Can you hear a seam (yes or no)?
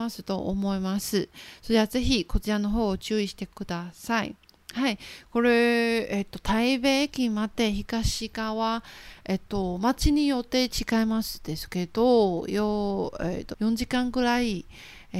yes